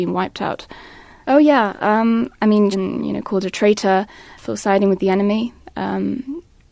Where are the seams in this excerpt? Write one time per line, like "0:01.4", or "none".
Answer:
0:01.2
0:02.7
0:04.4